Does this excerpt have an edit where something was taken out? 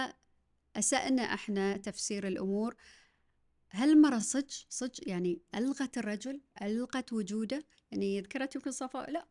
no; 0 cuts

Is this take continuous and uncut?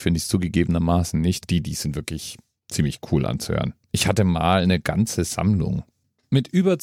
no; 1 cut; at 1.4 s

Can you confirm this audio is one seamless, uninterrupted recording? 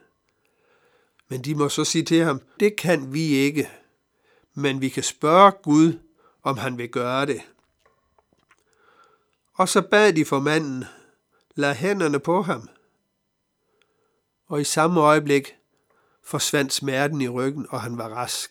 no; 1 cut; at 2.6 s

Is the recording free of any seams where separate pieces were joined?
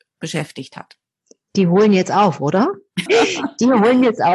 no; 1 cut; at 3.1 s

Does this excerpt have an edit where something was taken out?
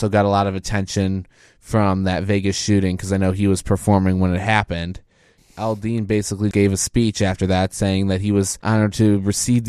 yes; 2 cuts; at 5.4 s, 6.5 s

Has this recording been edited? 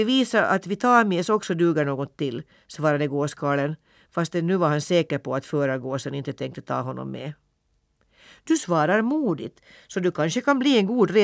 no; 0 cuts

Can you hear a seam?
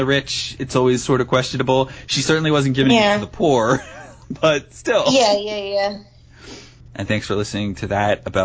yes; 1 cut; at 6.8 s

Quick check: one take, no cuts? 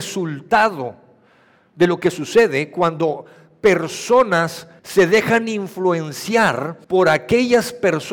no; 2 cuts; at 4.8 s, 6.8 s

